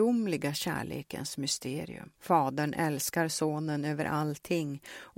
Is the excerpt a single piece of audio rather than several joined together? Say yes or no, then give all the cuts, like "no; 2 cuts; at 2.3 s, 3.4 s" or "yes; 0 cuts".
no; 1 cut; at 2.2 s